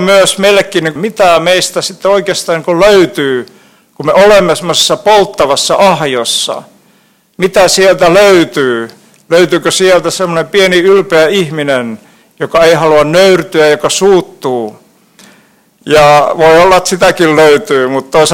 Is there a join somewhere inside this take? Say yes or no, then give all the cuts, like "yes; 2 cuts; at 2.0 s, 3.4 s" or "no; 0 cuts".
yes; 1 cut; at 1.0 s